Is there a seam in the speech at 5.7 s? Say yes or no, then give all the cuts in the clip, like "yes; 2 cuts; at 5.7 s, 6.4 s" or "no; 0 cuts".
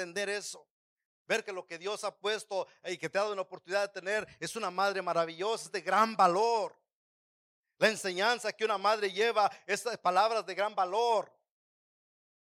yes; 2 cuts; at 1.1 s, 5.7 s